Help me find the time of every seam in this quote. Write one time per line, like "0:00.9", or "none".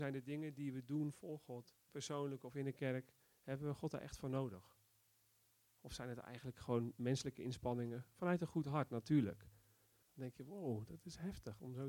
0:01.8
0:10.0